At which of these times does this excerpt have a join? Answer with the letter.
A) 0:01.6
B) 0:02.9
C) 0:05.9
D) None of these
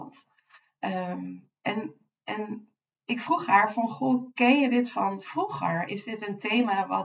A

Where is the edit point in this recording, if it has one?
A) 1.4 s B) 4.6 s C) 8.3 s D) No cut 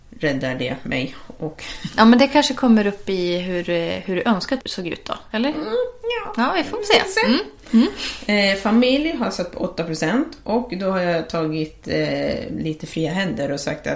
B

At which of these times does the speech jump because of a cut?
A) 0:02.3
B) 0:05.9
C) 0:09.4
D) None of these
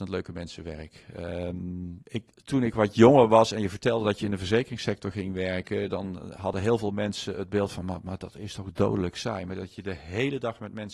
A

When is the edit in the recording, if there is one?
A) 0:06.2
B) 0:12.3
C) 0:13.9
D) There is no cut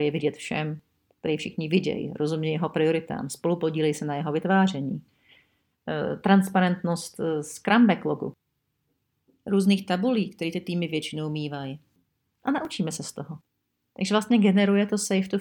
B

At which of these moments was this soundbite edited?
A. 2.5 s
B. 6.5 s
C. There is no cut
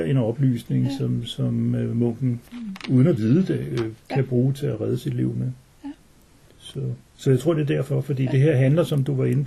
A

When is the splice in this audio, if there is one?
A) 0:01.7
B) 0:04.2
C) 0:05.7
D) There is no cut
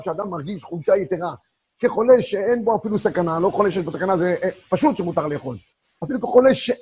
D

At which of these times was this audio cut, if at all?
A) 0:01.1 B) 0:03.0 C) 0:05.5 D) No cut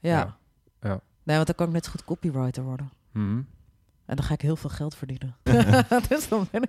C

